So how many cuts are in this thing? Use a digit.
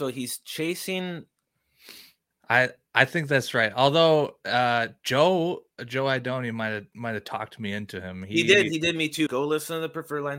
2